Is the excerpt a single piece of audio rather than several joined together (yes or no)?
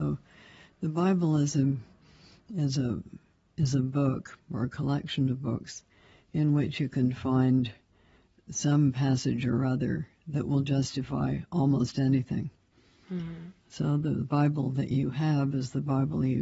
yes